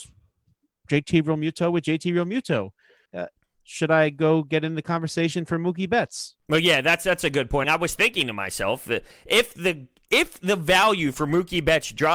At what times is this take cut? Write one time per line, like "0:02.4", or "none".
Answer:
0:03.1
0:07.6